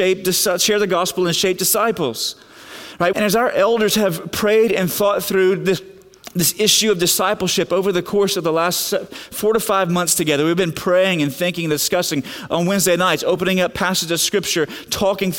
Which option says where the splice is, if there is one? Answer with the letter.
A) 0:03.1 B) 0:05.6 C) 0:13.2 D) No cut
A